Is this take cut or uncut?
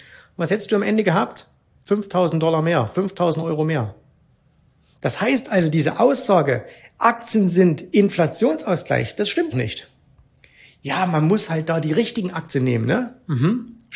cut